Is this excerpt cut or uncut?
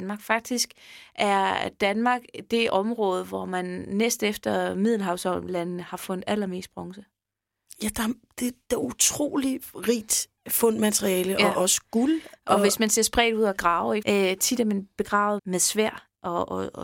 cut